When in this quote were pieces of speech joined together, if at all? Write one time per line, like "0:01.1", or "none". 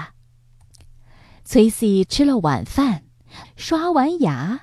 0:01.4
0:03.4